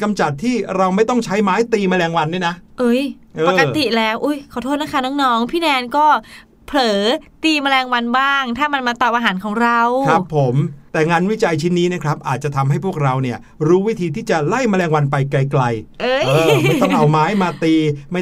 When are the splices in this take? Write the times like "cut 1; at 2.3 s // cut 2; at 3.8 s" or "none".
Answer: none